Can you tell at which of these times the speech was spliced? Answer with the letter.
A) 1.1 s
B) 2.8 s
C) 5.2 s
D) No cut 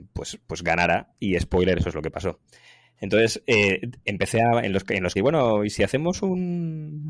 C